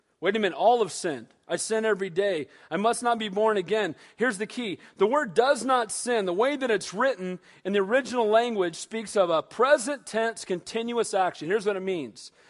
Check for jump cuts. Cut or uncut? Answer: uncut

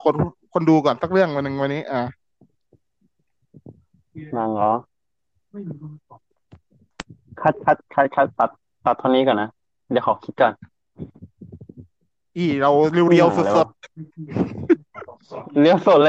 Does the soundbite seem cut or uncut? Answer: uncut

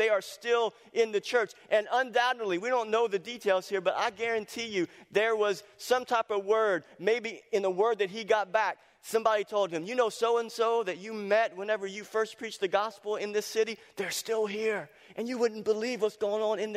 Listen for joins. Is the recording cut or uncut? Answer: uncut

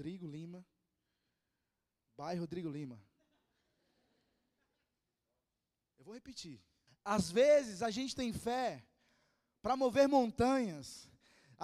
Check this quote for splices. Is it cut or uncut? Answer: cut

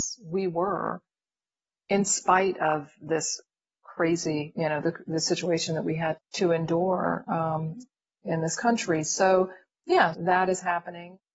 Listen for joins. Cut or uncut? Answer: cut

